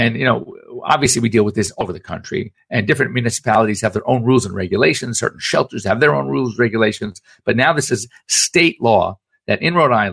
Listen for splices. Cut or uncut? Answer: uncut